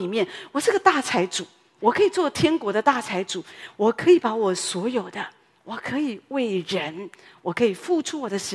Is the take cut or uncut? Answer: uncut